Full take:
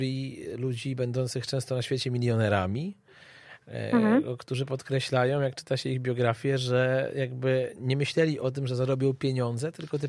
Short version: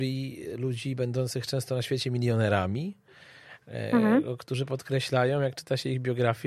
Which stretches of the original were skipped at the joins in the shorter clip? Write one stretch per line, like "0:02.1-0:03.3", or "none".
none